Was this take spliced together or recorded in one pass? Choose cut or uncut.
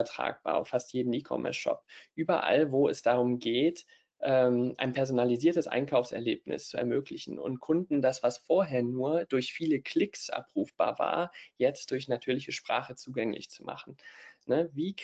uncut